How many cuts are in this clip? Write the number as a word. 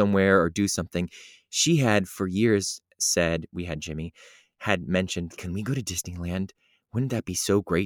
two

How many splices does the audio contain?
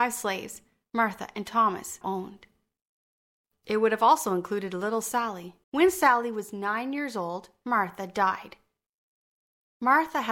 three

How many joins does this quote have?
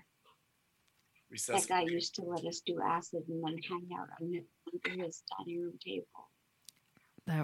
zero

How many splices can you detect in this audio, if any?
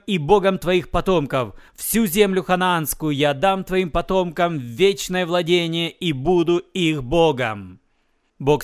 one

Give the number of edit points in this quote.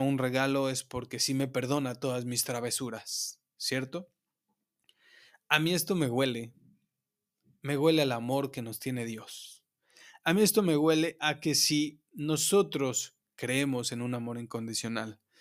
zero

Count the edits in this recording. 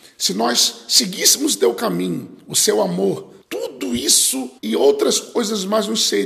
two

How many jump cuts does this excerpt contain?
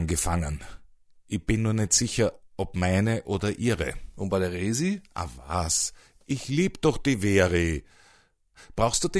zero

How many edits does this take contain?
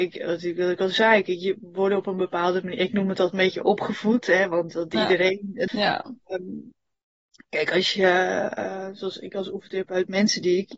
one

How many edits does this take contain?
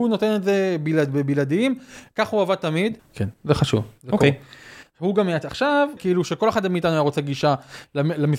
two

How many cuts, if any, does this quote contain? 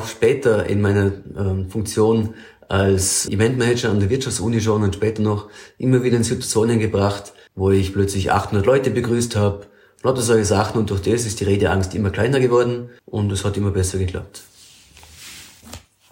three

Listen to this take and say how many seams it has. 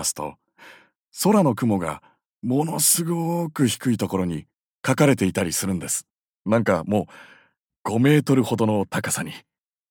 two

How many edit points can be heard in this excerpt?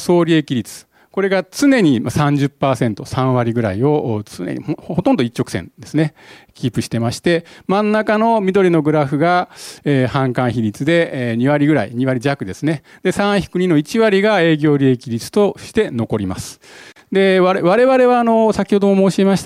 zero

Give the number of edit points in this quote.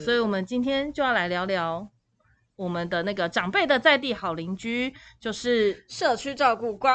zero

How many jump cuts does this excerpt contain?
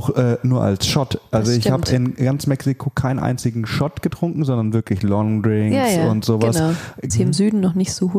one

